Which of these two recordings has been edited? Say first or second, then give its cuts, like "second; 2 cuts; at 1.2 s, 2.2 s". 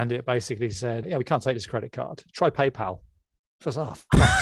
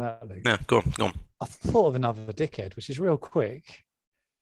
first; 1 cut; at 1.0 s